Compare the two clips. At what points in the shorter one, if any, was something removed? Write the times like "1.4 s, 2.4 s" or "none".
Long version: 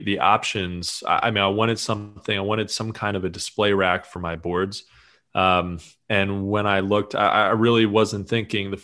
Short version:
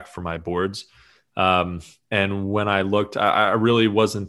none